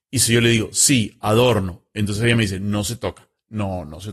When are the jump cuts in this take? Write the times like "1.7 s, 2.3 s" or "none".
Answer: none